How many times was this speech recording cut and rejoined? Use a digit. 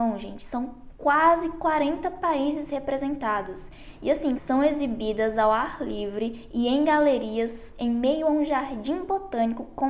1